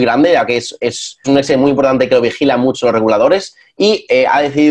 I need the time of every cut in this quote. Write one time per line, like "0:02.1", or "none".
0:01.2